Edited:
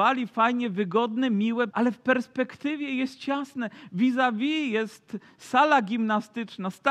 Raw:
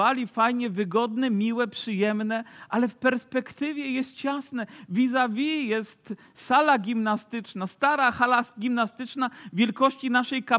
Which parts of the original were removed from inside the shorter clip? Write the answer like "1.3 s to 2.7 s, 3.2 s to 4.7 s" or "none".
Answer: 1.7 s to 2.7 s